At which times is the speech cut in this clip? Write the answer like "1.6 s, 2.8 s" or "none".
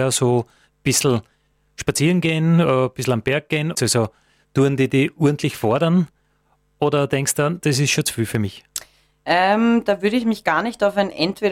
3.7 s